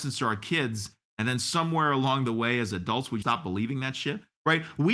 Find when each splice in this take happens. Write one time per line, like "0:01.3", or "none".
0:03.2